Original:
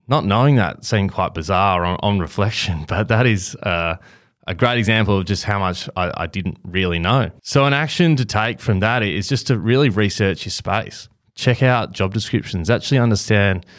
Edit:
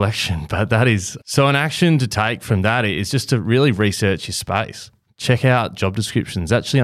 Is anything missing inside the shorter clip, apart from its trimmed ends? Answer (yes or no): yes